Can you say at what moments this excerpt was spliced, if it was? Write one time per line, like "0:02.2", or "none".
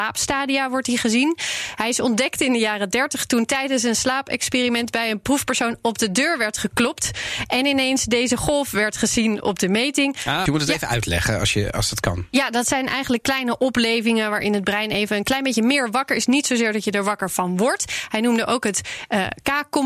0:10.5